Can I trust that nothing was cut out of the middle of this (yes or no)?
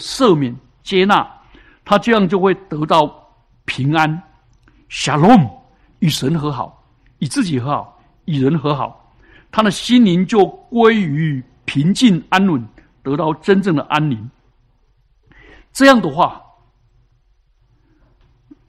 yes